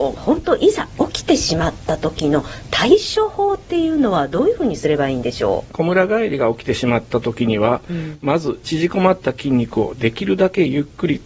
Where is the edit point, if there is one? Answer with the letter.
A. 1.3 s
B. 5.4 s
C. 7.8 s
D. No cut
D